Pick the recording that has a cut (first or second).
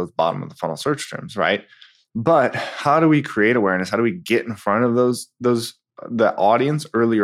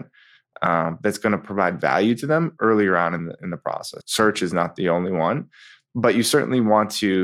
second